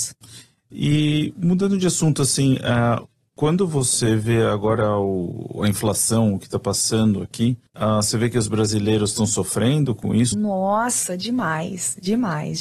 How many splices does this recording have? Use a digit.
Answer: 2